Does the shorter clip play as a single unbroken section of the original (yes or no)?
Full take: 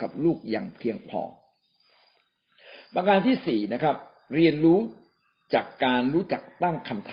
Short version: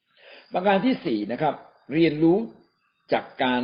yes